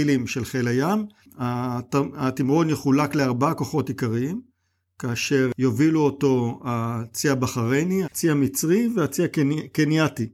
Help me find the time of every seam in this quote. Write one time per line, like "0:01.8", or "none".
0:01.2
0:08.0